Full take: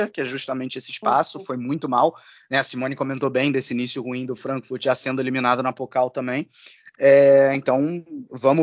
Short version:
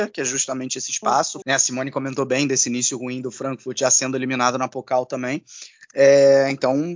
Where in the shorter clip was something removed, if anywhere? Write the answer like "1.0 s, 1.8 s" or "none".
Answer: 1.4 s